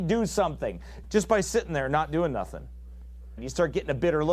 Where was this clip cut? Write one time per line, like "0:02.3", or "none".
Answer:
0:01.0
0:03.4